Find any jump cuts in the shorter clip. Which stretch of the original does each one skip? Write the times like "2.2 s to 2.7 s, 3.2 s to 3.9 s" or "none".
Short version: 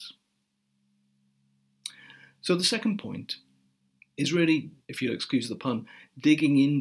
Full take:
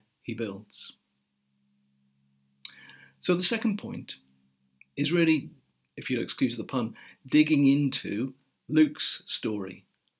5.6 s to 5.9 s